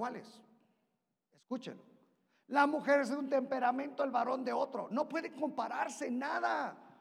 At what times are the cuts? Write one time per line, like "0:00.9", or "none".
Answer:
none